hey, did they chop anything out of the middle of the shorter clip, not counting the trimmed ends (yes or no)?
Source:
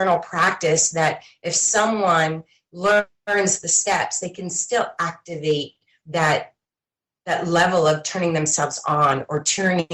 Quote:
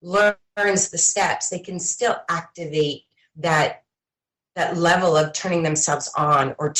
no